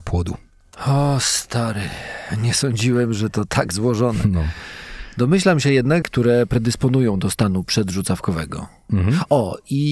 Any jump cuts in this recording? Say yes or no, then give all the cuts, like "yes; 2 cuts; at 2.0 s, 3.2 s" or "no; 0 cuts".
yes; 2 cuts; at 6.0 s, 8.9 s